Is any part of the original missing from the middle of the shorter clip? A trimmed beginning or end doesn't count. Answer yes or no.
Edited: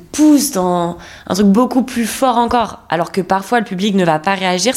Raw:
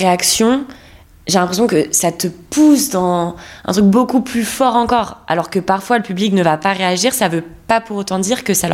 no